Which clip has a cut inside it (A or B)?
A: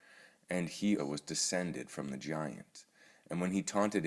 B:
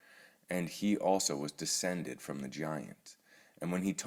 A